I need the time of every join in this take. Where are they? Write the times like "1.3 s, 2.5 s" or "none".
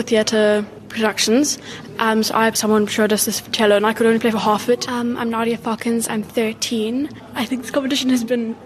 2.5 s, 4.9 s